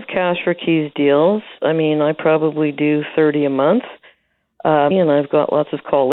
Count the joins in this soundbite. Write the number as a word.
one